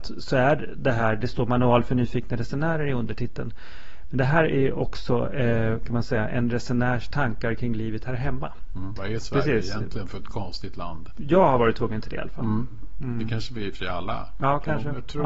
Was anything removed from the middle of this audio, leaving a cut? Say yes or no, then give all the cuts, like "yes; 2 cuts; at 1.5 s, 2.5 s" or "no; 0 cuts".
yes; 1 cut; at 8.9 s